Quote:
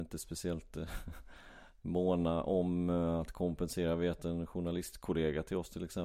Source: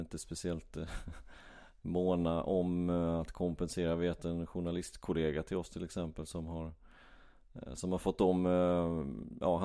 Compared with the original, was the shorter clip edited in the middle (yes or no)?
no